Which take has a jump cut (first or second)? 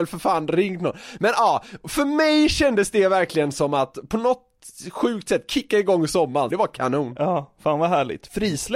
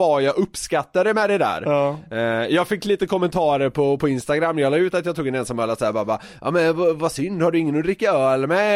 first